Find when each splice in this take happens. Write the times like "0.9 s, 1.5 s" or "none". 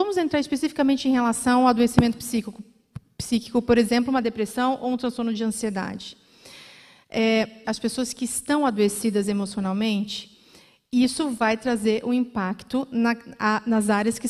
7.6 s